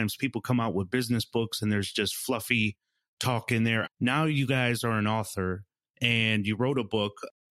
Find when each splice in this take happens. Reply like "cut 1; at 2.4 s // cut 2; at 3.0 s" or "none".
cut 1; at 3.8 s